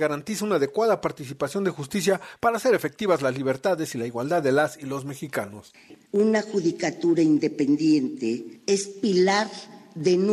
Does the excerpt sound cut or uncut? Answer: uncut